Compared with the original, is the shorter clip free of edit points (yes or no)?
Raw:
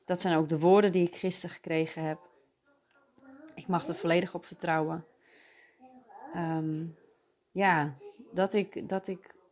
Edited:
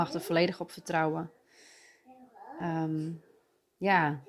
yes